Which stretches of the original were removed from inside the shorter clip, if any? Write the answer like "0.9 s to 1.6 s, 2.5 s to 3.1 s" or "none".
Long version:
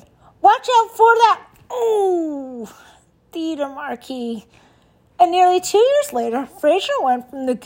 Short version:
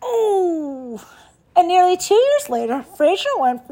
3.1 s to 5.1 s